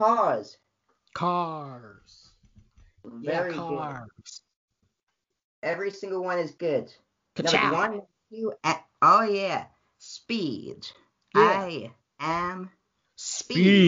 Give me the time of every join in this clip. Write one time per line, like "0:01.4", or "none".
none